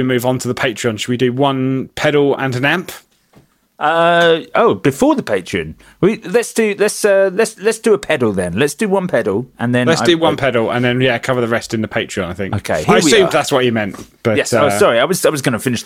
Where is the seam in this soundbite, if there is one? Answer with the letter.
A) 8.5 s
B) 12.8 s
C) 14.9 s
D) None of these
B